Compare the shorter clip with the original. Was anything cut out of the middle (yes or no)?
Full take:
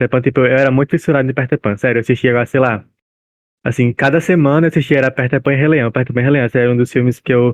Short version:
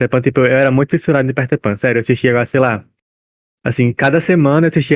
no